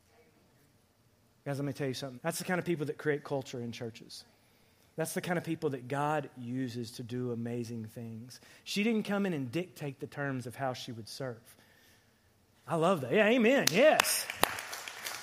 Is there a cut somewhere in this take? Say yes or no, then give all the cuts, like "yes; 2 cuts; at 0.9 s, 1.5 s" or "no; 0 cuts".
yes; 2 cuts; at 2.2 s, 12.5 s